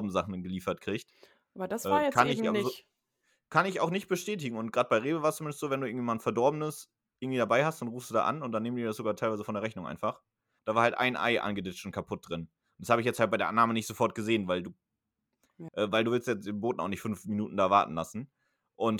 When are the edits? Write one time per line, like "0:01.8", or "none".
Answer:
0:10.6
0:15.7